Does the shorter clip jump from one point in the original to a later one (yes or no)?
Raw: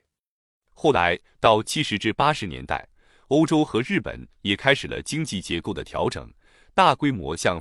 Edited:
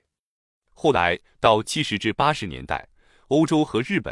no